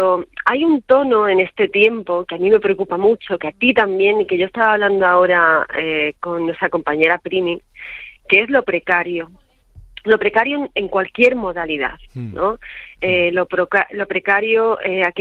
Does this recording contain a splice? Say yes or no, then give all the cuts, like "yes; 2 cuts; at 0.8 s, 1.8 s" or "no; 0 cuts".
no; 0 cuts